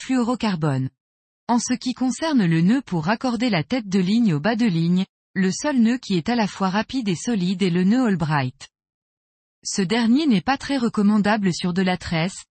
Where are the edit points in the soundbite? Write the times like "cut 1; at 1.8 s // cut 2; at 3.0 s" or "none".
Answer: cut 1; at 1.4 s